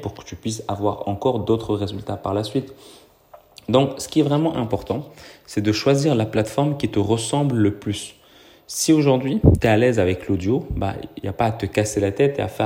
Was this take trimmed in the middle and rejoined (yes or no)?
no